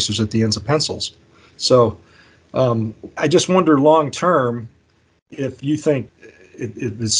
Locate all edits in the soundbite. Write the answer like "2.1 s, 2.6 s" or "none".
3.2 s, 6.1 s

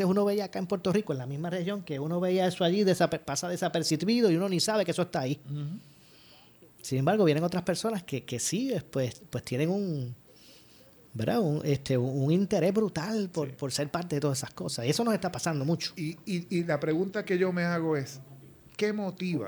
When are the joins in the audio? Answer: none

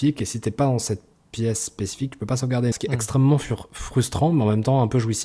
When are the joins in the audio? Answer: 2.7 s

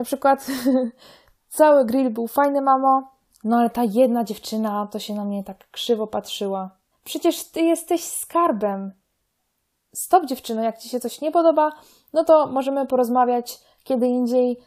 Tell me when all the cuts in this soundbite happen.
6.9 s

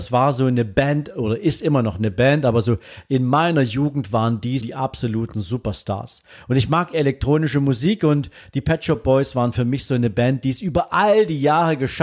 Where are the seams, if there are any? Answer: 4.6 s, 6.9 s

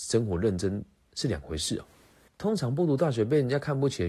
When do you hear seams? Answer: 2.3 s

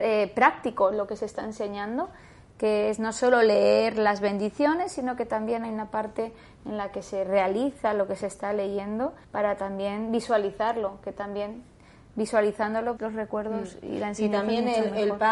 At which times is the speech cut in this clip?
9.2 s, 13.0 s

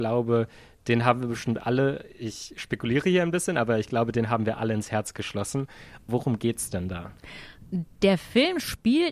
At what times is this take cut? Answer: 6.1 s

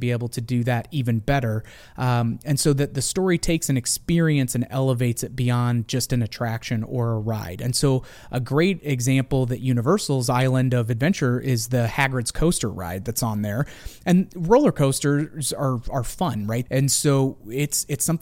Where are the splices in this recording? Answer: 16.7 s

